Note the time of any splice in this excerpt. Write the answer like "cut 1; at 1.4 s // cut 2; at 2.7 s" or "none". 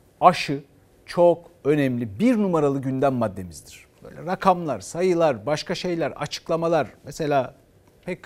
none